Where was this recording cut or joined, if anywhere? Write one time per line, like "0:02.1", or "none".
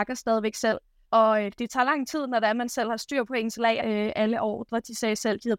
0:01.1
0:03.8